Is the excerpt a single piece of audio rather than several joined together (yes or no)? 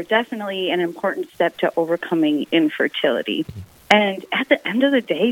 no